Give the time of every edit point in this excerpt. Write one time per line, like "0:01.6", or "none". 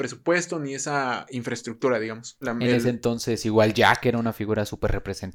0:02.4